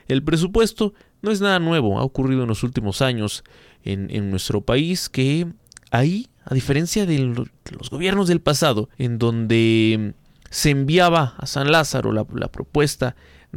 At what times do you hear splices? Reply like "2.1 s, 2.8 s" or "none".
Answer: 8.9 s